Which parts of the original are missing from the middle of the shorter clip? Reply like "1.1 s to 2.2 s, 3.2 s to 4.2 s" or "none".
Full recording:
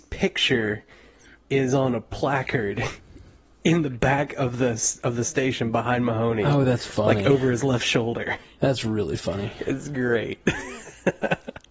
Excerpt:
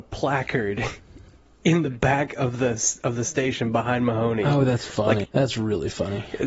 7.2 s to 8.5 s